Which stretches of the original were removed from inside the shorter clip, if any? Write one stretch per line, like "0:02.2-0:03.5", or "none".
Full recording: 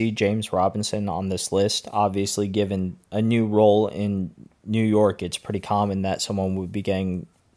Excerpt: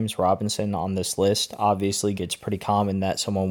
0:02.5-0:05.2